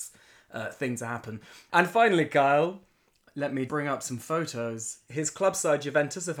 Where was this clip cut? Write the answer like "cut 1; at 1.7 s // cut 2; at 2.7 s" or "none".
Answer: cut 1; at 1.7 s // cut 2; at 3.7 s // cut 3; at 5.1 s